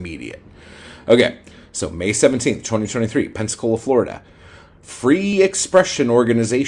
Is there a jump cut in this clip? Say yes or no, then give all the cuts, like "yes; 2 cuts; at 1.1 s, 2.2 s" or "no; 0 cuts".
no; 0 cuts